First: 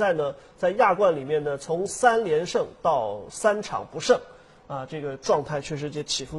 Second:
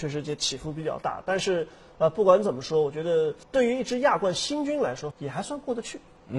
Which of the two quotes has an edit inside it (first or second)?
second